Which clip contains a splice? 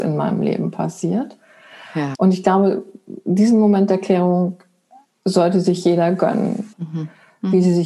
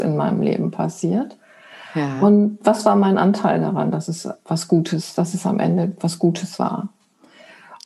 first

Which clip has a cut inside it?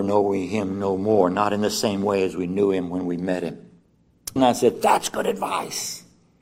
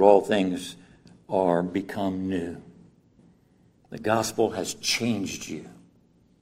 first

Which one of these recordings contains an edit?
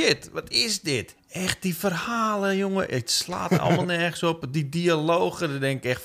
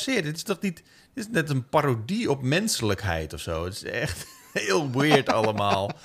first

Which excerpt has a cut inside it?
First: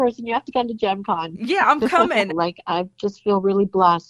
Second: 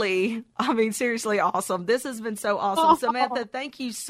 first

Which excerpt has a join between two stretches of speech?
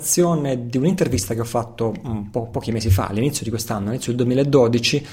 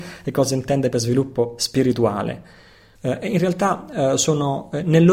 second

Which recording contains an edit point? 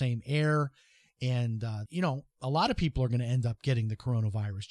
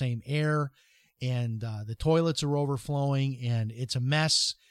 first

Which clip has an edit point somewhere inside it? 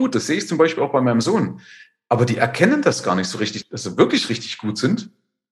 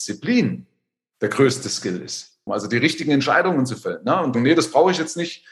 second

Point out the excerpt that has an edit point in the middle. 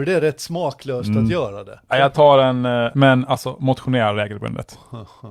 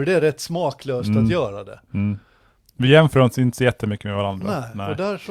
first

